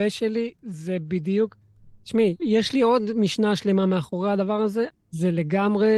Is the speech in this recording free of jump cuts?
no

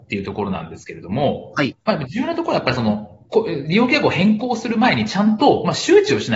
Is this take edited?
no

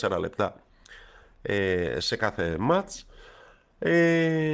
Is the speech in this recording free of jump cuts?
yes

